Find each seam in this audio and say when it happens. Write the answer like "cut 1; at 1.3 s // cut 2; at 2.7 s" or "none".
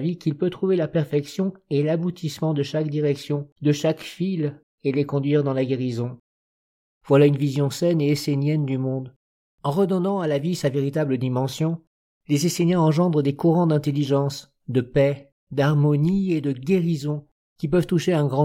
cut 1; at 3.5 s // cut 2; at 6.9 s // cut 3; at 9.5 s